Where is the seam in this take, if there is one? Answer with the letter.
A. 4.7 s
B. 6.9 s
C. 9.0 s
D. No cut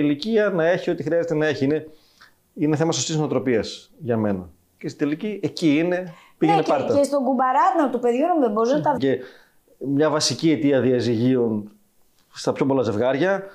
C